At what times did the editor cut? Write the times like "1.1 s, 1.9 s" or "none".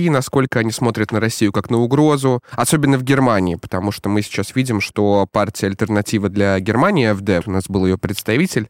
7.4 s